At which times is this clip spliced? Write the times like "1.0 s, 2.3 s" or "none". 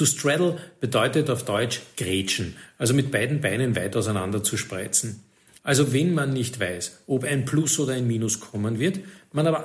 5.6 s